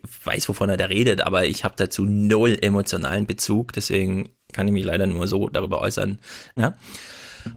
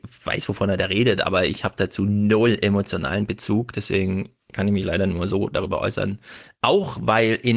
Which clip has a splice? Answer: first; 1 cut; at 6.6 s

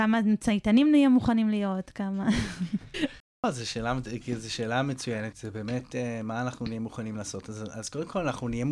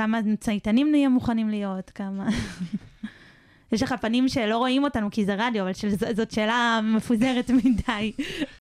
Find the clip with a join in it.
first; 2 cuts; at 2.9 s, 5.3 s

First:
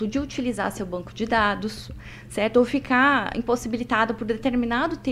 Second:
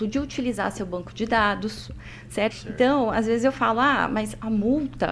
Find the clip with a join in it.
second; 1 cut; at 2.5 s

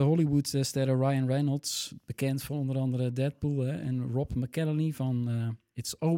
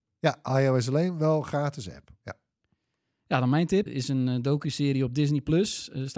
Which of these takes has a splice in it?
second; 1 cut; at 3.9 s

